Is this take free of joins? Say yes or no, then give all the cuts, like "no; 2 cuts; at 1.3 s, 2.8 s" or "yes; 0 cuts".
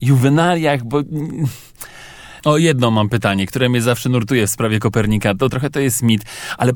no; 2 cuts; at 2.4 s, 5.5 s